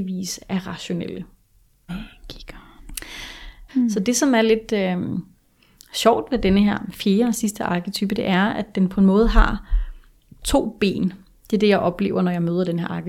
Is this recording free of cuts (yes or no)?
no